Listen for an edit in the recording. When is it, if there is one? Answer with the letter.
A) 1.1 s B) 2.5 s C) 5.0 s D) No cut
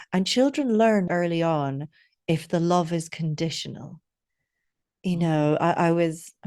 A